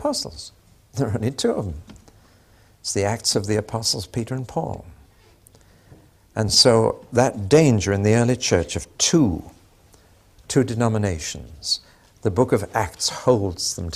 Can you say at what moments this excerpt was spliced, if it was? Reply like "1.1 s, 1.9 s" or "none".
none